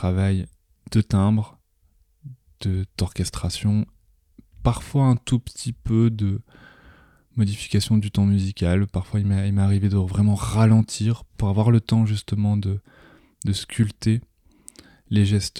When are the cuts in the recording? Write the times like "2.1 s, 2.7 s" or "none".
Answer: none